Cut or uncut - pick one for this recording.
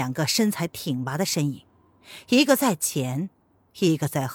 uncut